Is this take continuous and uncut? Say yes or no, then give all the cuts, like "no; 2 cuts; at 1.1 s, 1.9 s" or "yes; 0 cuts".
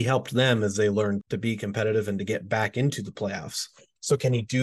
no; 1 cut; at 1.2 s